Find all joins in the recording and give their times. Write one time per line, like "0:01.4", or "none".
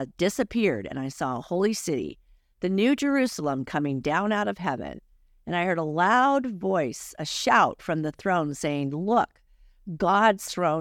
none